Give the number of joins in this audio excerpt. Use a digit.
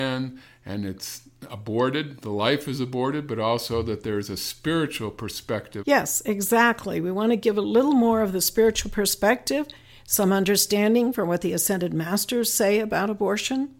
1